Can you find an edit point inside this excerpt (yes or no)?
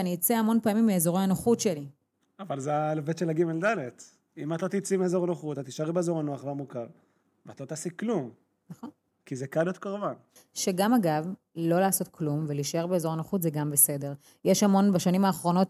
no